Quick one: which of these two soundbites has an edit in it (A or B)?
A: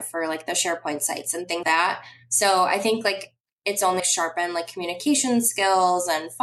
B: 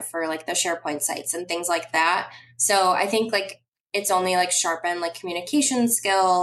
A